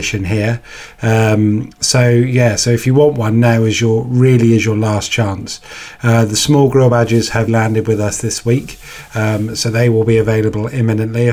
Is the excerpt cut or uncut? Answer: cut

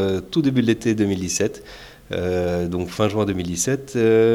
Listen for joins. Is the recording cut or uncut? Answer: uncut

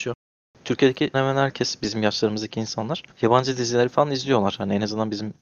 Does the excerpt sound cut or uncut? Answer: cut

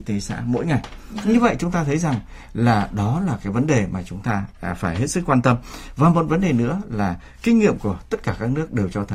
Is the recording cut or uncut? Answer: uncut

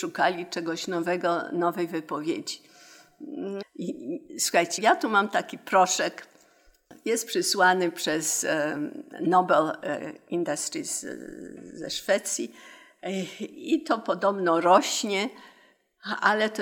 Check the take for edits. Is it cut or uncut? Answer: cut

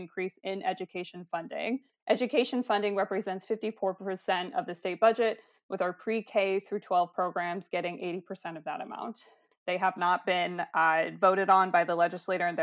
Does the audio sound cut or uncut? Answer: cut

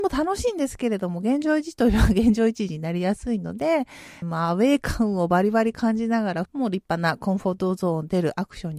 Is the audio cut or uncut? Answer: cut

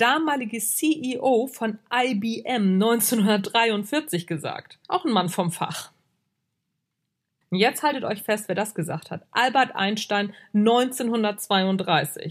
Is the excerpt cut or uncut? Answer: cut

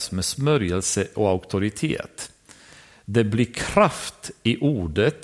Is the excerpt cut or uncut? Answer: uncut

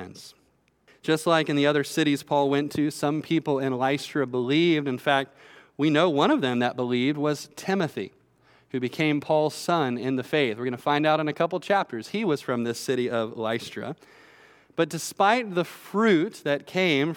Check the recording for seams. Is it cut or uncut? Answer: uncut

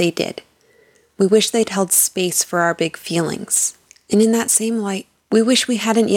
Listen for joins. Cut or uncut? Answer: uncut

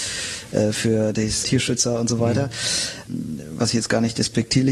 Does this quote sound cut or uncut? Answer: cut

